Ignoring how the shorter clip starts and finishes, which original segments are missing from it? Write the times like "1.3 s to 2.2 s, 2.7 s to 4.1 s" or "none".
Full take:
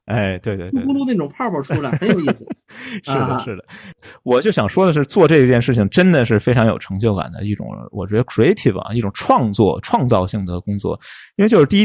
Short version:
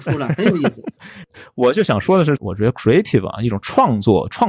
2.6 s to 3.7 s, 5.1 s to 7.9 s